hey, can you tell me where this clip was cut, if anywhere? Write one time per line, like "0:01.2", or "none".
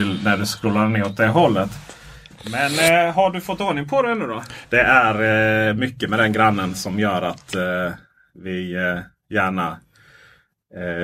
0:04.6